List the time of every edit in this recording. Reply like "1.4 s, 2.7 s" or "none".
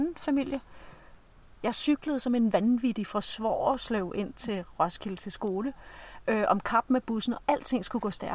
1.6 s